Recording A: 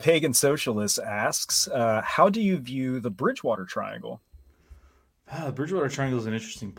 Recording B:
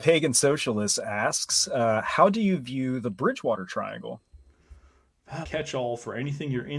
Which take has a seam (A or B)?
B